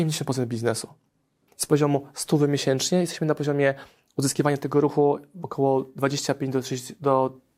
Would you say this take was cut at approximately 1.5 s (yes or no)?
yes